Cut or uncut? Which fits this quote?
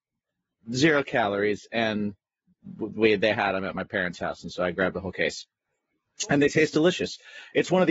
uncut